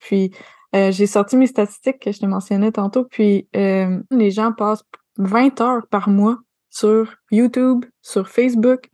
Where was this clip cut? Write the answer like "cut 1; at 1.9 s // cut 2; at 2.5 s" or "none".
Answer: cut 1; at 4.1 s // cut 2; at 7.2 s